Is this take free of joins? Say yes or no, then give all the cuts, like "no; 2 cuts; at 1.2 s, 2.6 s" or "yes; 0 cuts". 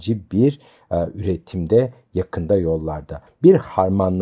no; 1 cut; at 3.3 s